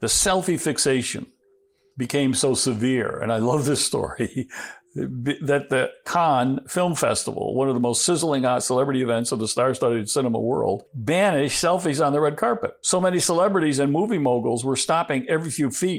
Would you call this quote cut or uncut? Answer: uncut